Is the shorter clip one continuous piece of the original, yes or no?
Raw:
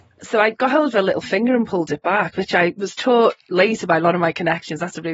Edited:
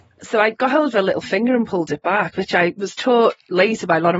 yes